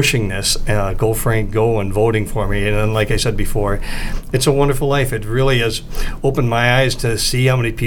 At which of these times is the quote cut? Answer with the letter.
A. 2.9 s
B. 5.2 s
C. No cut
C